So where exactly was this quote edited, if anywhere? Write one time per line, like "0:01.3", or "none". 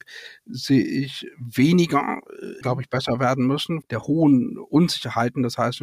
0:02.6
0:03.8